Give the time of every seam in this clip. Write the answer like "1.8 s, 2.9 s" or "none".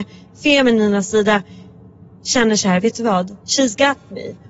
3.4 s